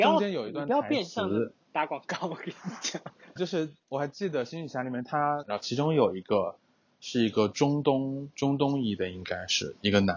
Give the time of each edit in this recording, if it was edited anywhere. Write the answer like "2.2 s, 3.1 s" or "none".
3.4 s, 5.4 s, 8.3 s